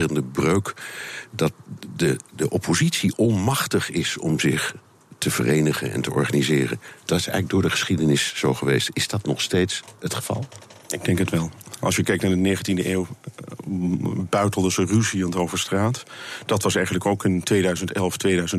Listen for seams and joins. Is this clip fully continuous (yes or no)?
yes